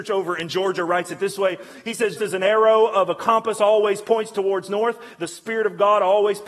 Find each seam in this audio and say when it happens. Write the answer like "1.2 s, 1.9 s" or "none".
2.2 s